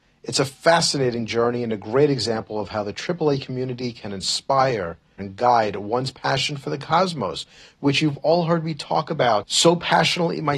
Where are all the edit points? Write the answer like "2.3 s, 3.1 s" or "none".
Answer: 5.2 s